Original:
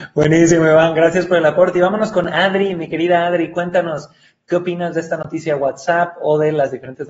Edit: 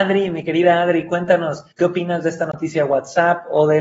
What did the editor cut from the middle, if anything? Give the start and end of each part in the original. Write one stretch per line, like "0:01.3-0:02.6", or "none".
0:04.2-0:04.4